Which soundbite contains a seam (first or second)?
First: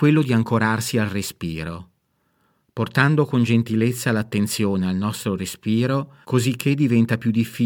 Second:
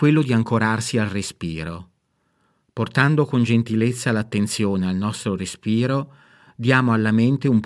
first